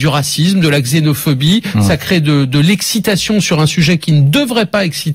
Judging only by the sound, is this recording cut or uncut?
uncut